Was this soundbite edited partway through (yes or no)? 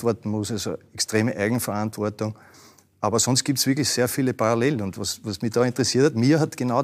no